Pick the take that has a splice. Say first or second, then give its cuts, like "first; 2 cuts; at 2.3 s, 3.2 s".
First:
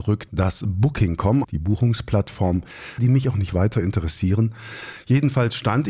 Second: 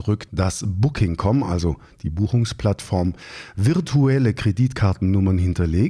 first; 2 cuts; at 1.4 s, 3.0 s